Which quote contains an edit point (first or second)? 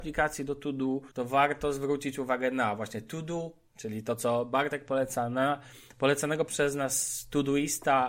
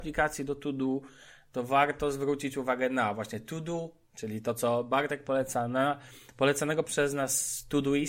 first